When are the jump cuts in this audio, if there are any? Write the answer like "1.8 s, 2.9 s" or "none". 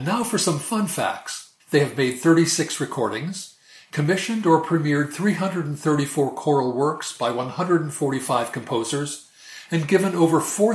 1.6 s